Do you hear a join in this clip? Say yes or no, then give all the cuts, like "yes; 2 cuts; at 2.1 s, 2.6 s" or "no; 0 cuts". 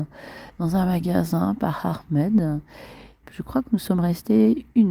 yes; 1 cut; at 3.2 s